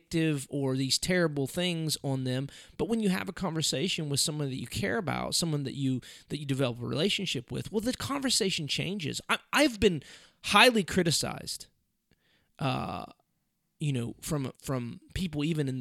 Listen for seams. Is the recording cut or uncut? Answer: cut